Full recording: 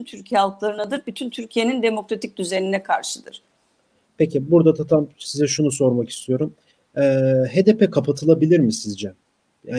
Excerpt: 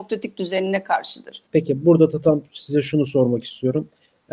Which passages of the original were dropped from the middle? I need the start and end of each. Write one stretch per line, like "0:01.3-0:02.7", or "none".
0:03.5-0:04.1